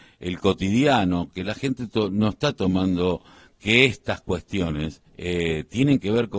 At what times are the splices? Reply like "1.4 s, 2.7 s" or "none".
5.1 s